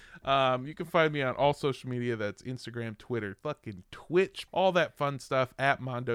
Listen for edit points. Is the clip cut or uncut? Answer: cut